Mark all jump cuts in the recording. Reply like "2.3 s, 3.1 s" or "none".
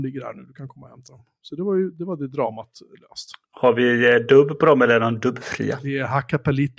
none

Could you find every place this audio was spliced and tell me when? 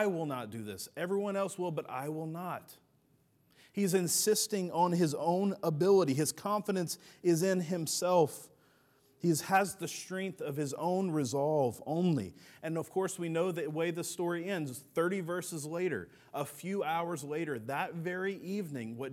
none

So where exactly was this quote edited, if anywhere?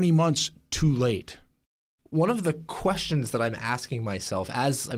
none

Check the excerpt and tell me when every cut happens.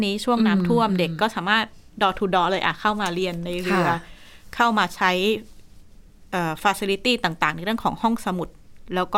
none

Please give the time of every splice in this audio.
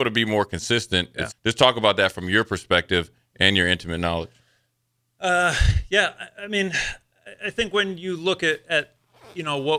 1.3 s

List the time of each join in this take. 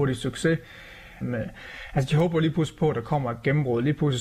1.2 s

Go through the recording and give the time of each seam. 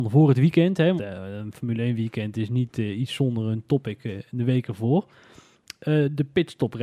1.0 s

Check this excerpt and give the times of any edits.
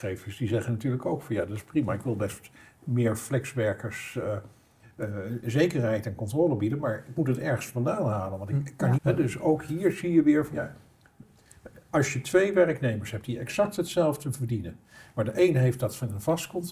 9.0 s

